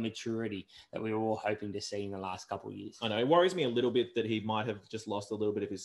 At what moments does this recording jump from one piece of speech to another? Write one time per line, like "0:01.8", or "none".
none

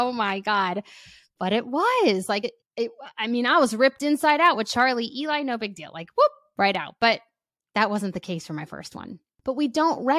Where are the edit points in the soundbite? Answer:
none

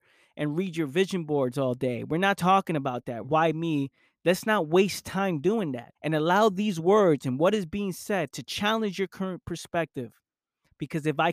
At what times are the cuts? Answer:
0:03.2
0:05.9

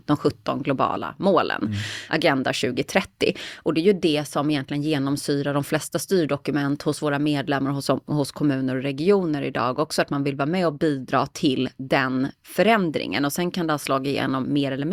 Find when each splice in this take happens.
none

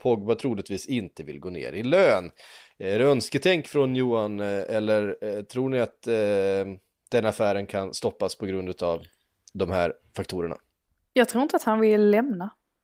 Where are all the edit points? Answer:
none

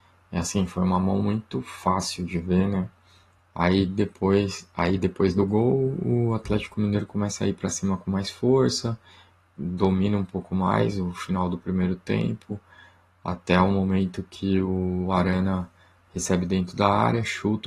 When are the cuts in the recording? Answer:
0:03.4

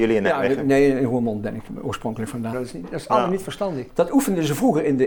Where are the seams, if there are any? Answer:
0:02.5
0:03.9

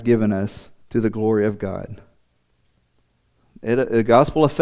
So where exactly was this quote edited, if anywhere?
none

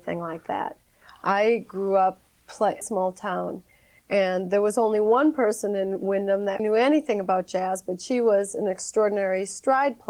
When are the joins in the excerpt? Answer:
0:02.8
0:06.6

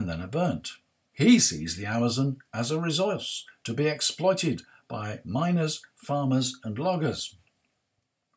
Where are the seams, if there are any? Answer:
0:01.1

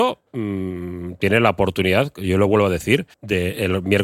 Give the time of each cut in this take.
0:03.1

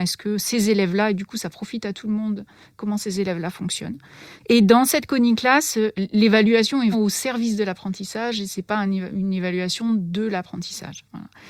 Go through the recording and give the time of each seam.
0:04.4
0:06.9

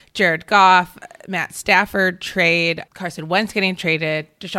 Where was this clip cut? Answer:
0:02.9

